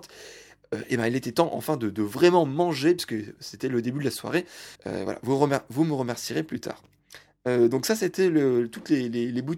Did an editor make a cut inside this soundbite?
yes; 1 cut; at 4.7 s

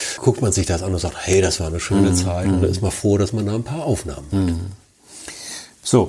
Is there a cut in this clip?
no; 0 cuts

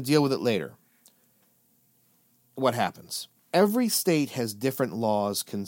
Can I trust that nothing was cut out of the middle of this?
no; 1 cut; at 3.3 s

